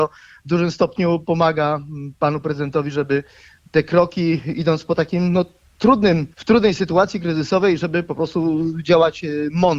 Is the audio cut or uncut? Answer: cut